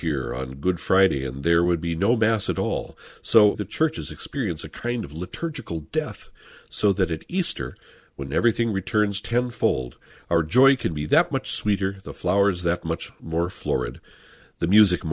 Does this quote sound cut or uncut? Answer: cut